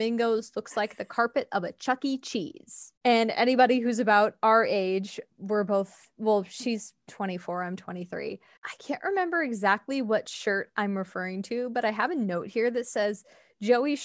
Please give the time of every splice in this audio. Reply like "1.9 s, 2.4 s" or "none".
5.3 s, 8.6 s